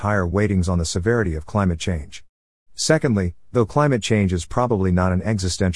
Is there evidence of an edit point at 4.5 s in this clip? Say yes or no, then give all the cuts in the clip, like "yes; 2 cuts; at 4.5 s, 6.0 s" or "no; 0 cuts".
no; 0 cuts